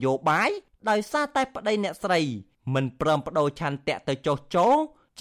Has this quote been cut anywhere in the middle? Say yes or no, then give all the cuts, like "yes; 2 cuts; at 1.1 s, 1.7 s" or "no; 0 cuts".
no; 0 cuts